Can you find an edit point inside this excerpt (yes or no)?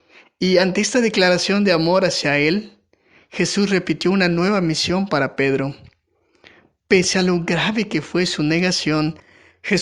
no